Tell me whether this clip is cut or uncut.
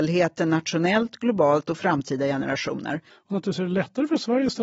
cut